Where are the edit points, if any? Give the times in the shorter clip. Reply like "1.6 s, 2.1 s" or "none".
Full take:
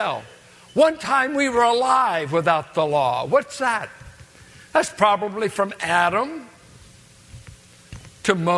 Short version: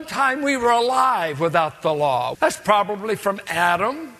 2.3 s